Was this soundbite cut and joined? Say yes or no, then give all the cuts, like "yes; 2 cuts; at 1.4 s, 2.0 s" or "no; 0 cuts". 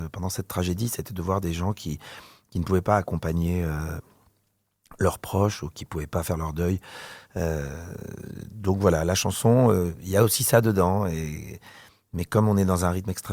no; 0 cuts